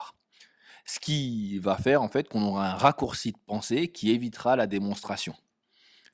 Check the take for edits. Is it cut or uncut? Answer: uncut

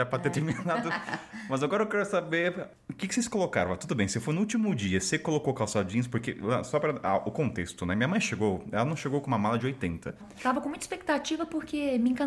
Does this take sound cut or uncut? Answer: cut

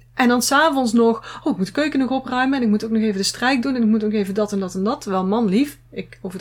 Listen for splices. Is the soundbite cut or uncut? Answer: uncut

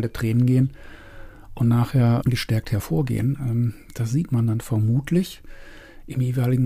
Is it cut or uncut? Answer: cut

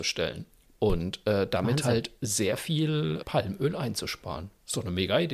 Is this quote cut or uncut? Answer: cut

